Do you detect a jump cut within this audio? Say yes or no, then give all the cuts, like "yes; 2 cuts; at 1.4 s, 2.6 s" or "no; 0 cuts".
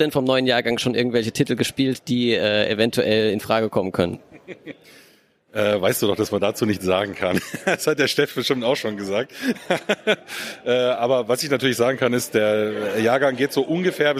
no; 0 cuts